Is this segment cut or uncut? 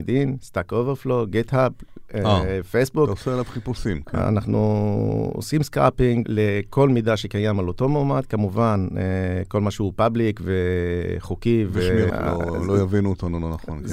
cut